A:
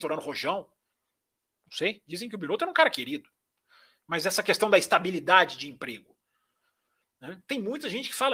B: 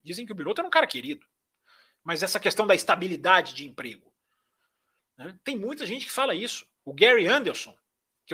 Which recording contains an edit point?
B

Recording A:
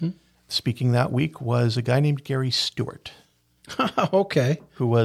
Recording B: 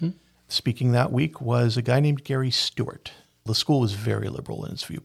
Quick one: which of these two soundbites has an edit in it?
B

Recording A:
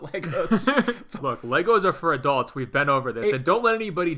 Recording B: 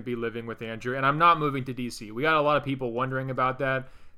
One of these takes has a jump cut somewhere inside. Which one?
A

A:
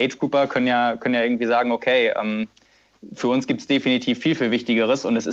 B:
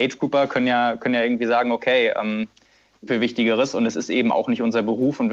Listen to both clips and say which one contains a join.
B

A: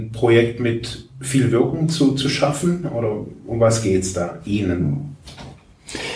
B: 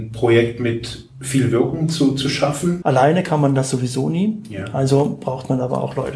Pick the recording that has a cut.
B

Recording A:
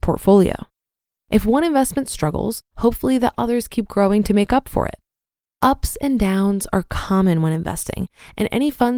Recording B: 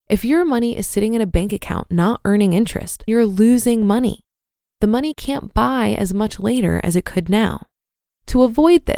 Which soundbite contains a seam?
B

